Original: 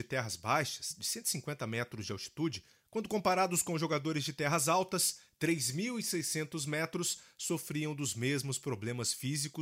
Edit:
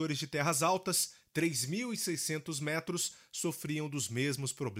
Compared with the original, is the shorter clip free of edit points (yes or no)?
yes